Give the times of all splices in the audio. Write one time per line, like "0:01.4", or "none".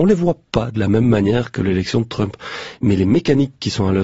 none